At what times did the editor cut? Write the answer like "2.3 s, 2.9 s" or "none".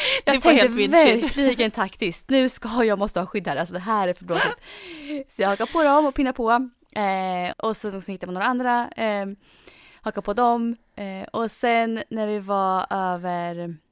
7.5 s

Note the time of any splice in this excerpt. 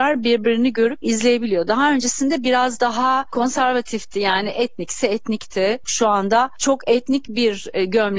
5.8 s

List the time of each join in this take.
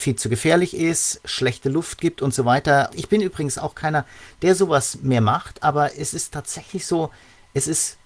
2.9 s

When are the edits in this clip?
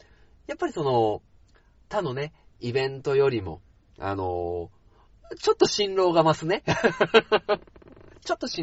none

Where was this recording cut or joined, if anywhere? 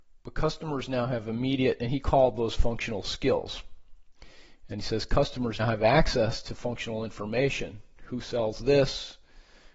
5.6 s

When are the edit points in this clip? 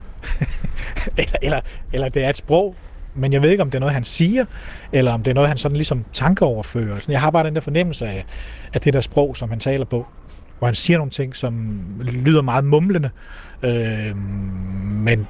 3.1 s

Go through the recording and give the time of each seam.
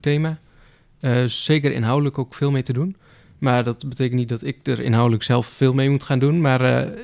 none

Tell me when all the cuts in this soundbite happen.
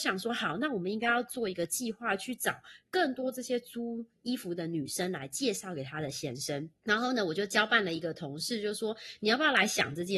6.8 s

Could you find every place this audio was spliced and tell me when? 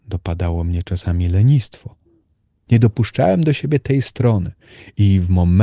2.7 s

